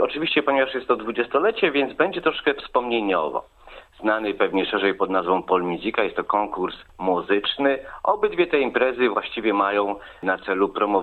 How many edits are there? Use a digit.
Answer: 1